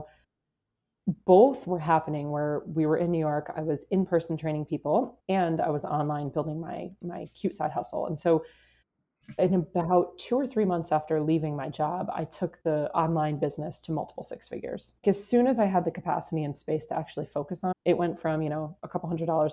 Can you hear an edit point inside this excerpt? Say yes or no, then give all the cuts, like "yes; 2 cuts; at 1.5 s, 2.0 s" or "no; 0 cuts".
yes; 2 cuts; at 15.0 s, 17.7 s